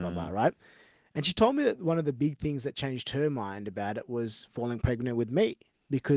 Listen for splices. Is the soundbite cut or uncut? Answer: uncut